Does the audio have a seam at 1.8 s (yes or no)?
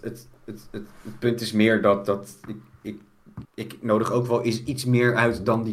no